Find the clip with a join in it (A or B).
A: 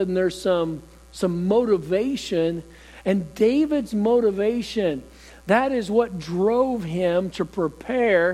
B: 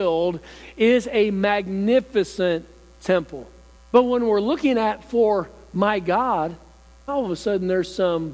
B